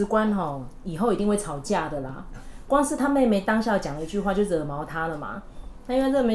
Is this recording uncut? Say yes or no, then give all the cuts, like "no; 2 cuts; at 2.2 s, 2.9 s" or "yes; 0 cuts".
yes; 0 cuts